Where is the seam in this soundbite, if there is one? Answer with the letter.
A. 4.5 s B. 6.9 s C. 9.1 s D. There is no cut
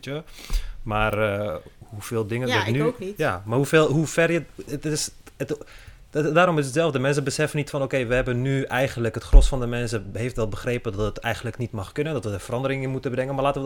D